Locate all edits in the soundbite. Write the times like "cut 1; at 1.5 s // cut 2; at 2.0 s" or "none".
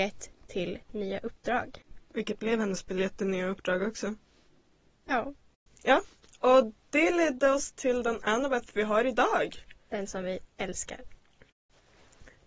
cut 1; at 2.1 s